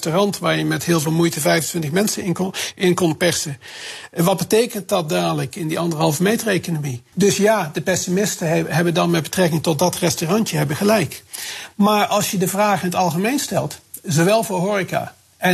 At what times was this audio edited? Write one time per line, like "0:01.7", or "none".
0:07.1